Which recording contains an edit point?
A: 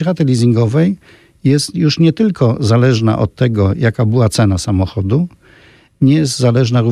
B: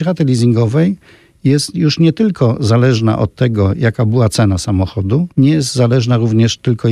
B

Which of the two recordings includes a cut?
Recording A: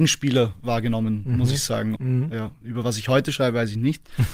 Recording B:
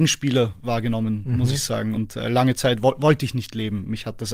A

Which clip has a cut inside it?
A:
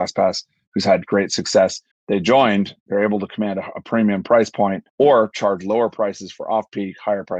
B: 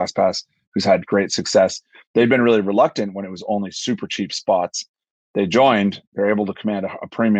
A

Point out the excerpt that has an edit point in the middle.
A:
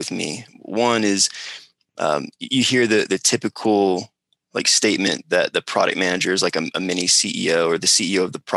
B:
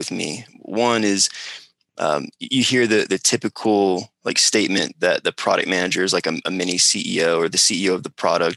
B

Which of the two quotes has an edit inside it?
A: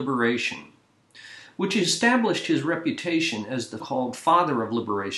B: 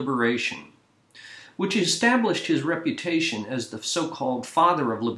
A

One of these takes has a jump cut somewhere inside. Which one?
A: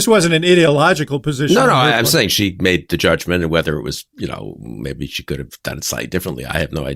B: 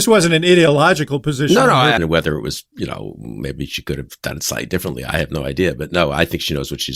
B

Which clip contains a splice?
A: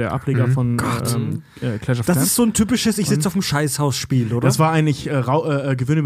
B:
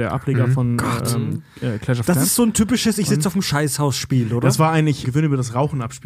B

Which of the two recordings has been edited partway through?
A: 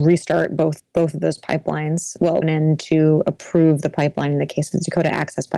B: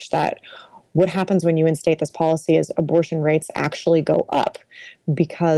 A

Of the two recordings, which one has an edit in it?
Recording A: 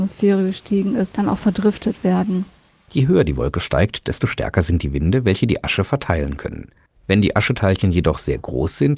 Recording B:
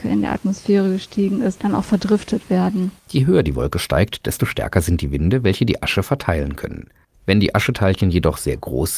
B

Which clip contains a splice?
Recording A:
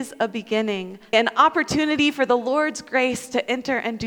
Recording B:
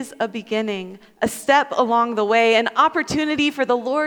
A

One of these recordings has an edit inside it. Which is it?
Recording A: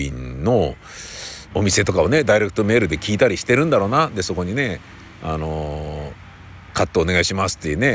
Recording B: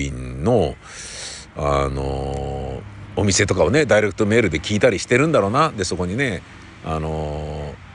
A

